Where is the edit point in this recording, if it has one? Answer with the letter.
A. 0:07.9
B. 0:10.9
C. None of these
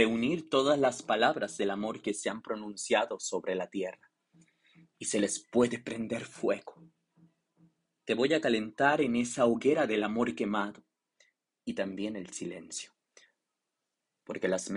C